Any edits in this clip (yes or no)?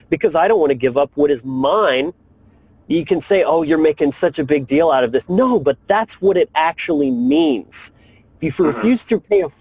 yes